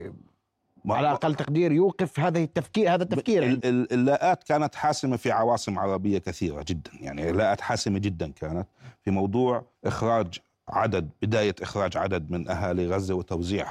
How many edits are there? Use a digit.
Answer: 2